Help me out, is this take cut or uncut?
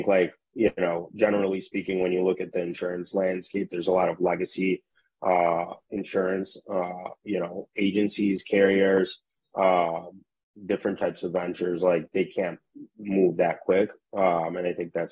uncut